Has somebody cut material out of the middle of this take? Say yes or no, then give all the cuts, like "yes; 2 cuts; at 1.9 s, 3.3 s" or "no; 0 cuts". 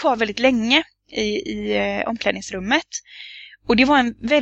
no; 0 cuts